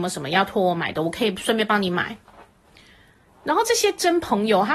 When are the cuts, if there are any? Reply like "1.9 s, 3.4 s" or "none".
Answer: none